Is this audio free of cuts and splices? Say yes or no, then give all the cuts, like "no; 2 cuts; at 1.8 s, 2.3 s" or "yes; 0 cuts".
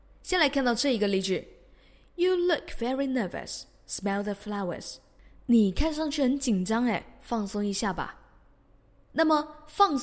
yes; 0 cuts